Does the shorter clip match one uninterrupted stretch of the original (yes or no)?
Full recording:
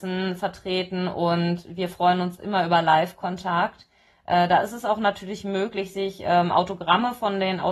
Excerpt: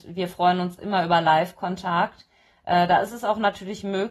yes